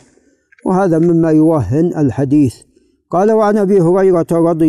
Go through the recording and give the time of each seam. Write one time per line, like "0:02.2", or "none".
none